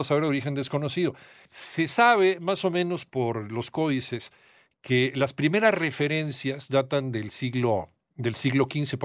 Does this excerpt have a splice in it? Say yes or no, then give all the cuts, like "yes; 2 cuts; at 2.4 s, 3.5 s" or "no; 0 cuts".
no; 0 cuts